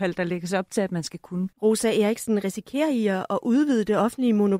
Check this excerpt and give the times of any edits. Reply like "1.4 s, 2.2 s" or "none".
1.5 s